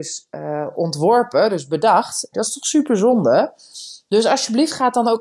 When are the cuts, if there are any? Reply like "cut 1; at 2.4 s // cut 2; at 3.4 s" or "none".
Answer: cut 1; at 2.3 s